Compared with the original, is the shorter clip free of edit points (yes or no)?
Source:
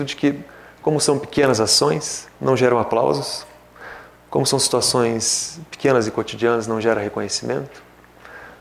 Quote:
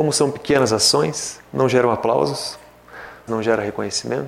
no